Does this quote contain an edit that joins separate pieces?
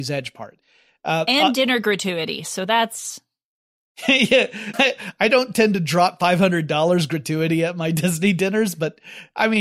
yes; 1 cut; at 4.7 s

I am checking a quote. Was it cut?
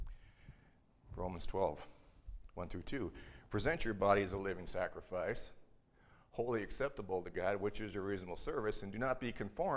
no; 0 cuts

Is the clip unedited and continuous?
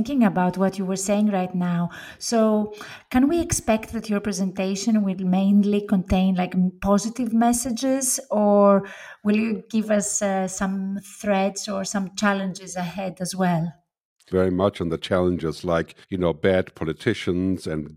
no; 2 cuts; at 14.3 s, 16.0 s

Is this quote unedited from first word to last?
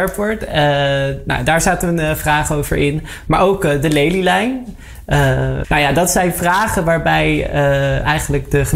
no; 1 cut; at 5.6 s

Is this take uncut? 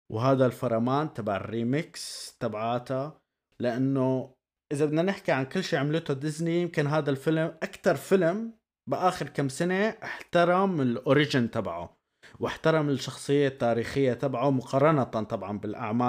yes; 0 cuts

